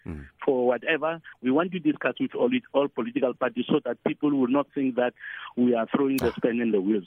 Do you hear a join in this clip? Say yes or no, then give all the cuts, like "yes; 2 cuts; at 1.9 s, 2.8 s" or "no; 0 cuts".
yes; 1 cut; at 1.3 s